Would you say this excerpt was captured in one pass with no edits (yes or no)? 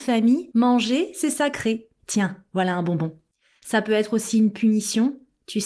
no